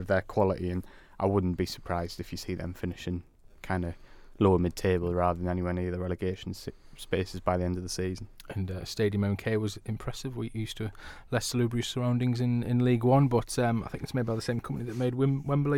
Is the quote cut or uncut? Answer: uncut